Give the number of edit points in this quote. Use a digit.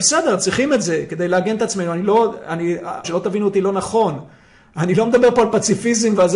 1